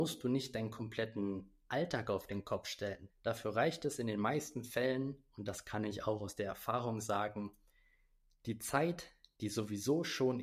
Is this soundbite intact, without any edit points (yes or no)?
no